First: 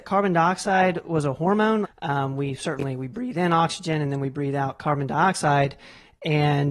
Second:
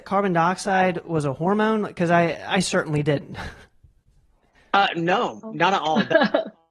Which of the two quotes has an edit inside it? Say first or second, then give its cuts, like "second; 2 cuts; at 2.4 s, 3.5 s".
first; 1 cut; at 1.8 s